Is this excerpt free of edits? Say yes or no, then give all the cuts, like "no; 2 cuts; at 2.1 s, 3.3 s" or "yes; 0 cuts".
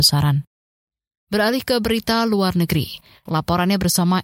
no; 1 cut; at 3.3 s